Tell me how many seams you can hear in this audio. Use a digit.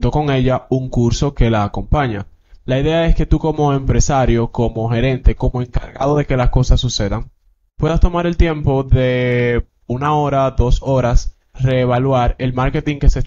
2